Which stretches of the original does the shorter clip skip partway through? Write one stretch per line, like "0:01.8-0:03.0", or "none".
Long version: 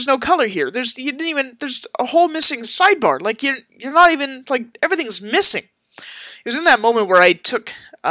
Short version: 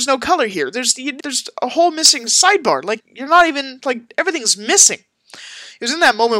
0:01.2-0:01.6
0:03.4-0:03.6